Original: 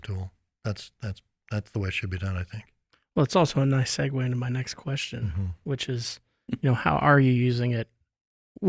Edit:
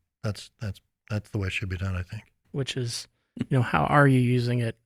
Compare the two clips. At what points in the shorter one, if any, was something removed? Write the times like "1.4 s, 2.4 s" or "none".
2.4 s